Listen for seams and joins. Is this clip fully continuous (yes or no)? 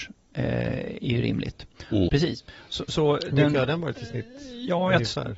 no